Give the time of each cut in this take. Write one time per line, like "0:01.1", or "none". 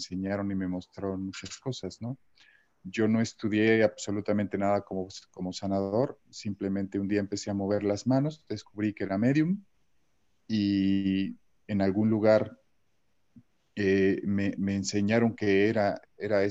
none